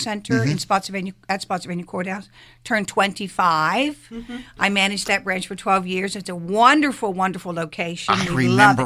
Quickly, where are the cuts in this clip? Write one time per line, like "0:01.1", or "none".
none